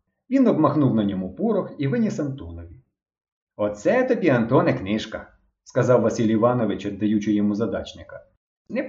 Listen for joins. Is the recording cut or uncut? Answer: uncut